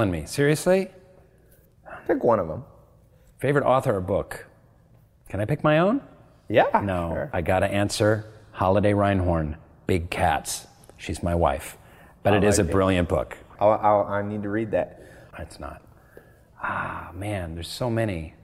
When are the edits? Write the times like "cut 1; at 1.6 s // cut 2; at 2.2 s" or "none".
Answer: cut 1; at 7.3 s // cut 2; at 13.5 s // cut 3; at 15.3 s